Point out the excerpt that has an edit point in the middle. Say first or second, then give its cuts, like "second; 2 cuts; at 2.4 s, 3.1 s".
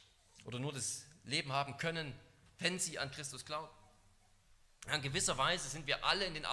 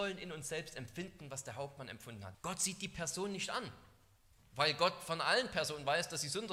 second; 1 cut; at 2.3 s